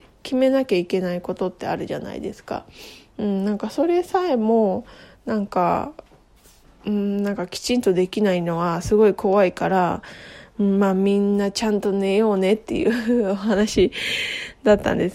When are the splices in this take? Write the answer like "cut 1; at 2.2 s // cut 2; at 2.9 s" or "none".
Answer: none